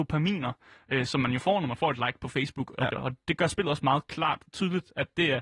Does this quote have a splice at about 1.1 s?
no; 1 cut; at 2.9 s

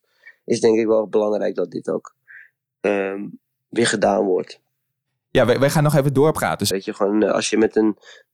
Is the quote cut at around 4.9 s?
no; 1 cut; at 6.7 s

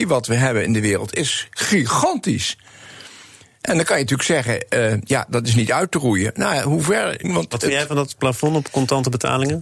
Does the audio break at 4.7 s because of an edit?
no; 1 cut; at 7.2 s

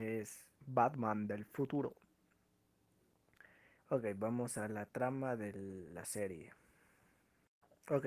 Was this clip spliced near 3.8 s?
yes; 1 cut; at 3.8 s

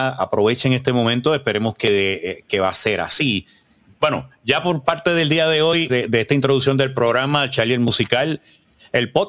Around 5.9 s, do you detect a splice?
yes; 2 cuts; at 3.9 s, 5.9 s

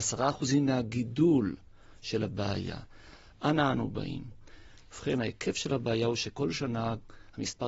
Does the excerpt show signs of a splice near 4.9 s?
yes; 1 cut; at 4.9 s

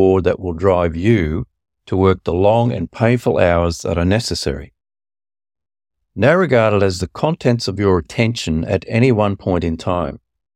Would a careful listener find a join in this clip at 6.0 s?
yes; 1 cut; at 6.0 s

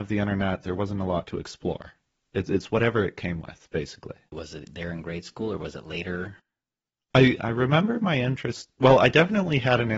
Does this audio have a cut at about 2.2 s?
no; 1 cut; at 4.3 s

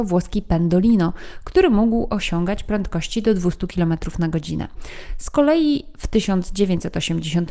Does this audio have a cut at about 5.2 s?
no; 0 cuts

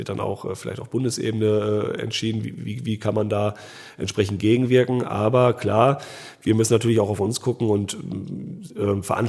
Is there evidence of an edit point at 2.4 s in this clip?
yes; 1 cut; at 2.4 s

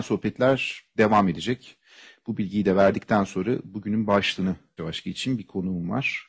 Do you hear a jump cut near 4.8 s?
yes; 1 cut; at 4.8 s

